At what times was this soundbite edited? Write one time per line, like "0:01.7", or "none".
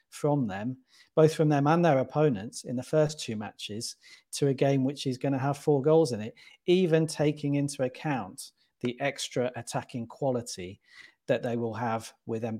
none